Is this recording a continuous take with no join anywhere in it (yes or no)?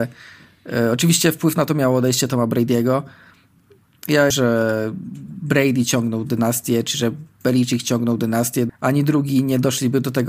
no